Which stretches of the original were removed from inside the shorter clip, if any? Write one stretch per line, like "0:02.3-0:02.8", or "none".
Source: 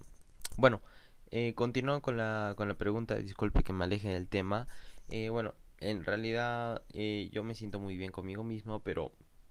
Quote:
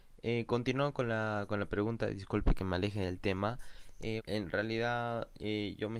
0:05.3-0:05.7

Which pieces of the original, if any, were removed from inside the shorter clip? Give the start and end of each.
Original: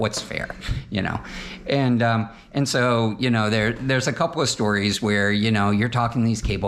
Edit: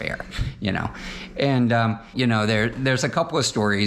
0:02.4-0:03.2

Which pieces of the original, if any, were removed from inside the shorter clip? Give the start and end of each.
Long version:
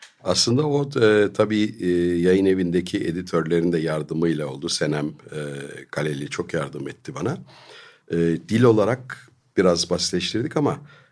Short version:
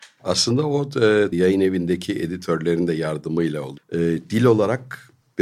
0:01.3-0:02.2
0:04.6-0:08.0

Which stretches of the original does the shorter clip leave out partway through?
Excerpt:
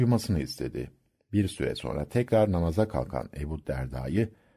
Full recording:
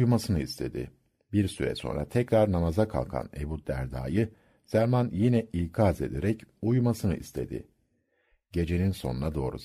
none

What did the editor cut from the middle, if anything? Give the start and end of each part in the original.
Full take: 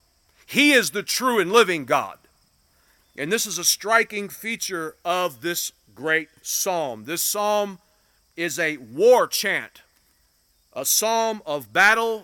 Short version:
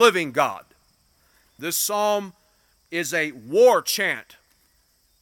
0:03.1-0:07.0

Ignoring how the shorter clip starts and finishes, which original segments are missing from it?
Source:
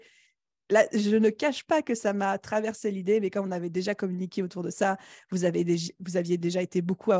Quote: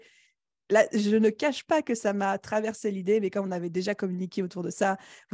none

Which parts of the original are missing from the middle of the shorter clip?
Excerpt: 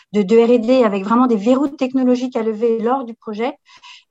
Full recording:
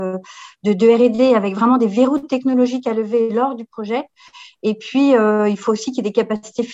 none

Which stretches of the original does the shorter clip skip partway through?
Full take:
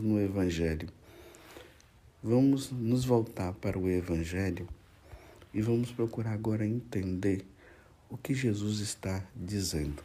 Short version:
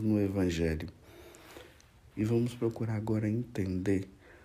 0:02.1-0:05.5

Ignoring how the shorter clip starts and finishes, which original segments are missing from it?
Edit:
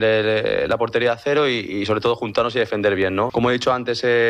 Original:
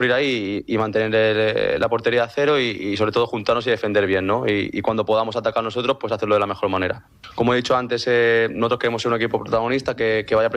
0:04.4-0:07.3

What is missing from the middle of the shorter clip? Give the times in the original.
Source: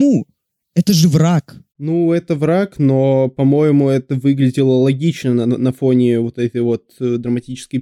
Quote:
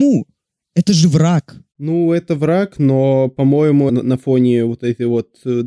0:03.9-0:05.4

